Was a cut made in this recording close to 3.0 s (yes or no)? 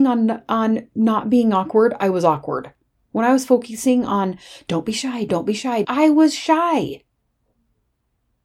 no